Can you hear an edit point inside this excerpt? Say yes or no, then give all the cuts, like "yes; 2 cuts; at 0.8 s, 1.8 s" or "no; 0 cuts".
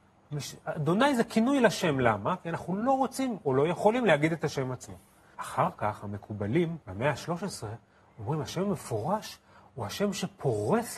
yes; 2 cuts; at 5.3 s, 6.8 s